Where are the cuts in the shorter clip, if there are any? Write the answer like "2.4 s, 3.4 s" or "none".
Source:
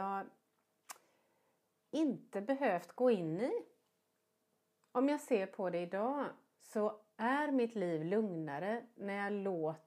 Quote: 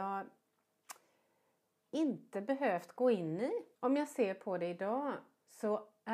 3.8 s